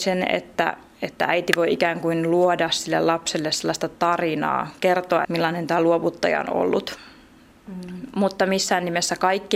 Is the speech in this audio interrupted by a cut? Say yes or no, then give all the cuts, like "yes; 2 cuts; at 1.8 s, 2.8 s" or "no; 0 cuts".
yes; 2 cuts; at 5.2 s, 7.5 s